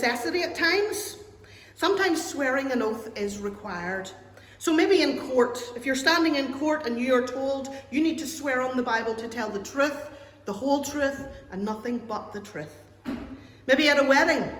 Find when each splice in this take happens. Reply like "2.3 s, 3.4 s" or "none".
1.6 s